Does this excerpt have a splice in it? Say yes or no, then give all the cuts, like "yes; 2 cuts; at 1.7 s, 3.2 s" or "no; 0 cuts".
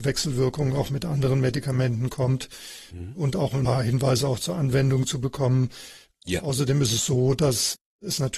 no; 0 cuts